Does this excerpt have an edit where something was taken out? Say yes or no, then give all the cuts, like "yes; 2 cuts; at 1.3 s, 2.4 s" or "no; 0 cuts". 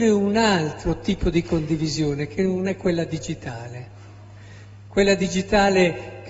no; 0 cuts